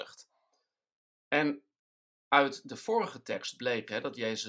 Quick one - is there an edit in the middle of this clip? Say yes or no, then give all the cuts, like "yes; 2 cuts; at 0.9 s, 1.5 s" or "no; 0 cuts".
no; 0 cuts